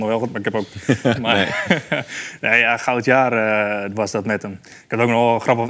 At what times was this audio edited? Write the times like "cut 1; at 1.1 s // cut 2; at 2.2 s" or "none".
cut 1; at 1.1 s